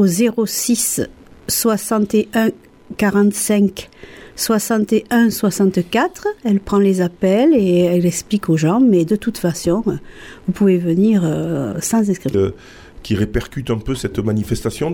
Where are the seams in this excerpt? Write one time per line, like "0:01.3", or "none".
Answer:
0:12.3